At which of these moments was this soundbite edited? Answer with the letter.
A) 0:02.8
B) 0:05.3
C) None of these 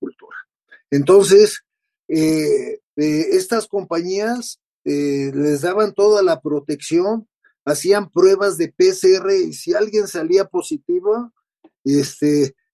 A